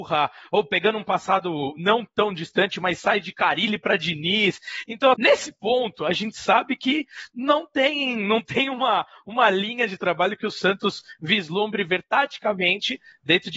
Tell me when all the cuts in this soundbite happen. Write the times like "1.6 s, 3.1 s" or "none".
5.1 s